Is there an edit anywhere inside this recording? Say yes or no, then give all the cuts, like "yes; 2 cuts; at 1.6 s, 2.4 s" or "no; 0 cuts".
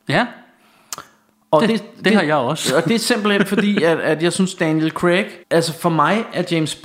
yes; 1 cut; at 5.4 s